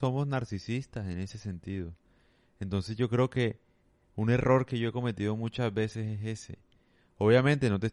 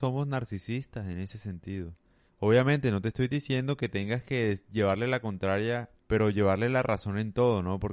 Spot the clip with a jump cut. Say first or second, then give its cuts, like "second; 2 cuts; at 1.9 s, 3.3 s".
second; 2 cuts; at 2.3 s, 6.0 s